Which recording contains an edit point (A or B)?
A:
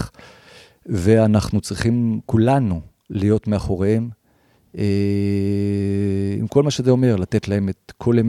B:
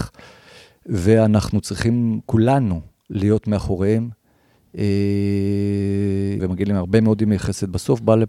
B